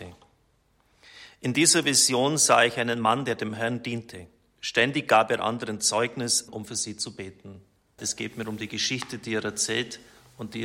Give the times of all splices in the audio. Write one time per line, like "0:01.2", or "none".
0:06.5
0:08.0